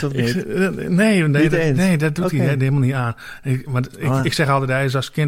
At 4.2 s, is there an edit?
no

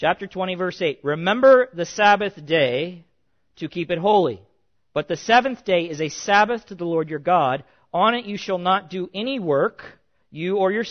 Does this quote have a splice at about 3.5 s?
no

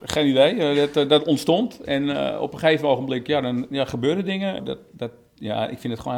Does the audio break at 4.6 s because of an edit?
yes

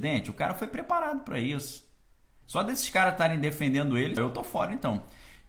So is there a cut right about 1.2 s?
no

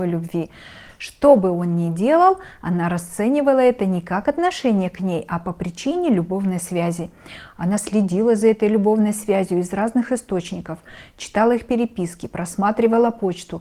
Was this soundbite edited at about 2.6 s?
no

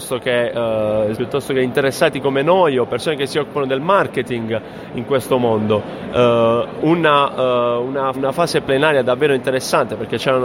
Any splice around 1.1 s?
yes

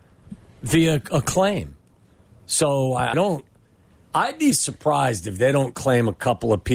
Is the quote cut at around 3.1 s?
yes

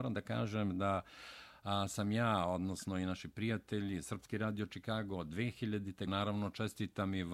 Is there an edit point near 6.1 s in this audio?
yes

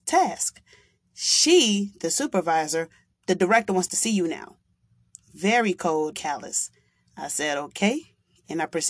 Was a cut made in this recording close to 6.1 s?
yes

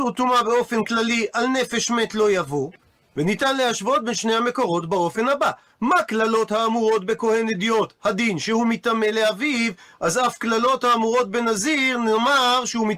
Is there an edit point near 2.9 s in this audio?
no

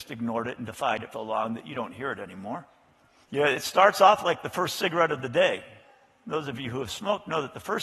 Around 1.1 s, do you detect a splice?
yes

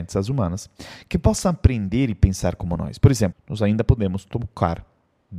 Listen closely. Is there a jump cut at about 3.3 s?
yes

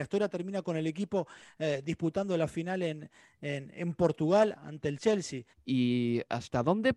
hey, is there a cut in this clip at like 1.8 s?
no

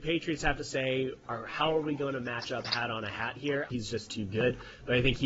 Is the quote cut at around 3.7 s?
yes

